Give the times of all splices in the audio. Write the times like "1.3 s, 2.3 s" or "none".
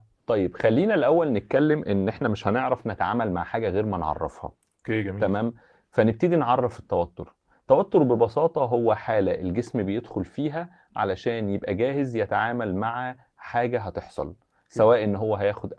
none